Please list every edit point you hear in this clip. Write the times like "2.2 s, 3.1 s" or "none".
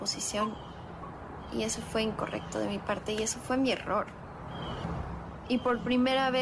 none